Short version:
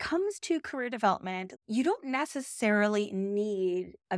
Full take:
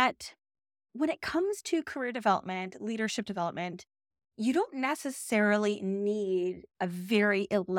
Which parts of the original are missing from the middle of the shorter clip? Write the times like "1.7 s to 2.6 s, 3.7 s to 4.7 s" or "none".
2.8 s to 4.3 s